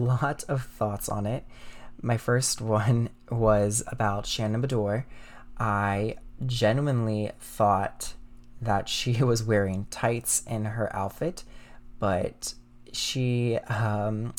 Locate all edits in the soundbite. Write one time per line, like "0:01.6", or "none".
none